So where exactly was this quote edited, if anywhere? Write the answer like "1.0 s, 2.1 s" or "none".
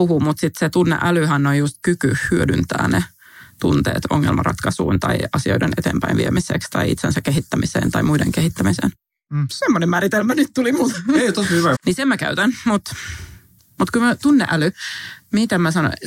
11.7 s